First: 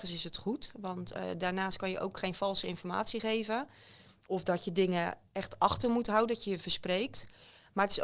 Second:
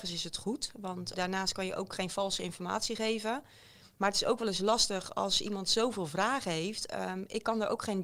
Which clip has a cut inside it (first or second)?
second